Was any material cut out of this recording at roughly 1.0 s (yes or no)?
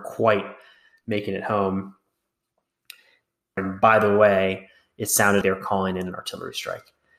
no